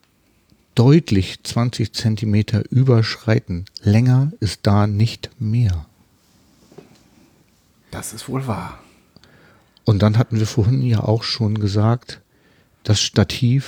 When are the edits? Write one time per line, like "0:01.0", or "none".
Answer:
none